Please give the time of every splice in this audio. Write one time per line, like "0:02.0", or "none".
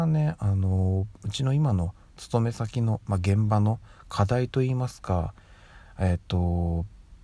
none